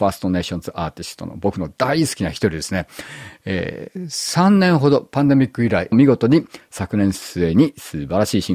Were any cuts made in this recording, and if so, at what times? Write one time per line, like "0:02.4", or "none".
0:05.9